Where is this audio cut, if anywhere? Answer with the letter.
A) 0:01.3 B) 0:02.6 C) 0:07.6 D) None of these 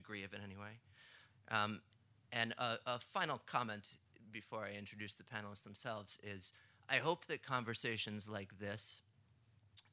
A